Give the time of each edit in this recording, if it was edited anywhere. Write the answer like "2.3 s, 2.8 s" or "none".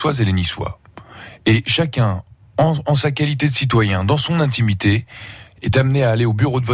none